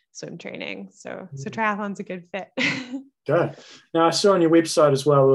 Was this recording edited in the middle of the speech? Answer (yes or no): no